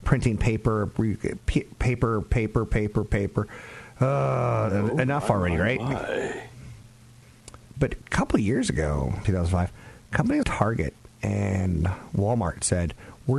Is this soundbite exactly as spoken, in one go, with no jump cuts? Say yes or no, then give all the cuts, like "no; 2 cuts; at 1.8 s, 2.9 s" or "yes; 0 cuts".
no; 2 cuts; at 9.2 s, 10.4 s